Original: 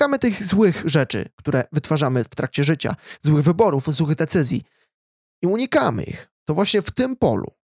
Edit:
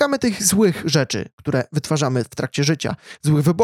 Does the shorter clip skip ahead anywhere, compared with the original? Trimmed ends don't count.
no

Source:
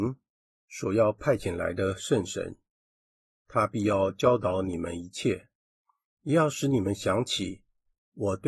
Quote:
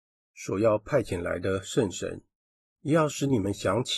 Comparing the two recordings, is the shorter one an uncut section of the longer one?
no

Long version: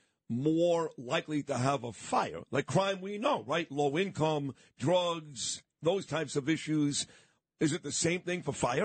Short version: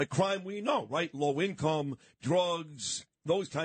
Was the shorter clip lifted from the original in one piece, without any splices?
yes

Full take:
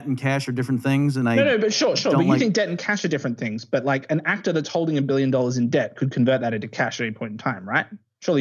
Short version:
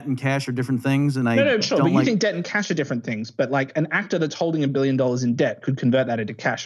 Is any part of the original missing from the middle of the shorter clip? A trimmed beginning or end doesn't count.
yes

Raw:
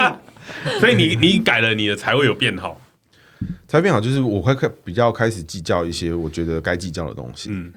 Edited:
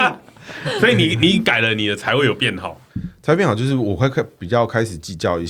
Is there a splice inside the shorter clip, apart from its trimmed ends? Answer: yes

